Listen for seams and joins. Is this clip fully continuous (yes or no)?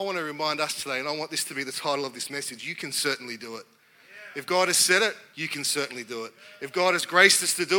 yes